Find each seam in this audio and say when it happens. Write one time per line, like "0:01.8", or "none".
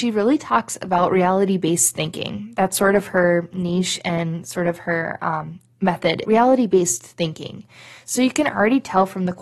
0:06.2